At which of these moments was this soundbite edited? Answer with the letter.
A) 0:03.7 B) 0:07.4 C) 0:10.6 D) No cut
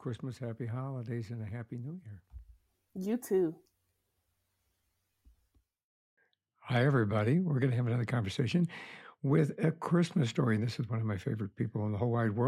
D